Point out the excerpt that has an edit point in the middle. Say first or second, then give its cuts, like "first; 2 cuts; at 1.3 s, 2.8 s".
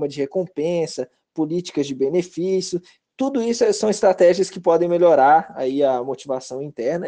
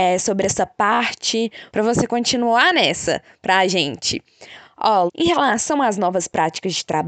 second; 2 cuts; at 1.7 s, 5.1 s